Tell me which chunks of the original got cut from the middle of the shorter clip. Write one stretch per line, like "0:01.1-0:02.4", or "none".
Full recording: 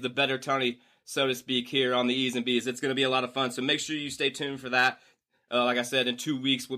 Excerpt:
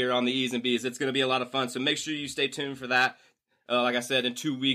none